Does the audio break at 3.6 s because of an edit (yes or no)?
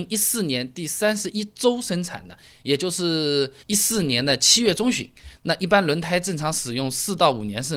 yes